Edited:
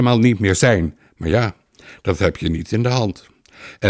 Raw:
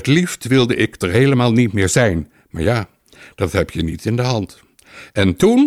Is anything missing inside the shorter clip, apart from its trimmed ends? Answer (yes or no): no